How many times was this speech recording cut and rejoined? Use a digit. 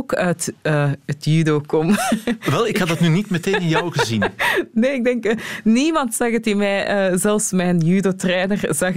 0